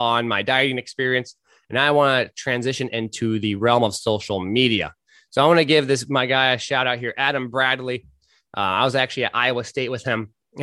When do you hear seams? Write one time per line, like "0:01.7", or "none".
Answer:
none